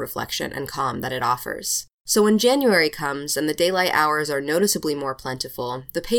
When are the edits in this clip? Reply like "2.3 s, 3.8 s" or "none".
2.0 s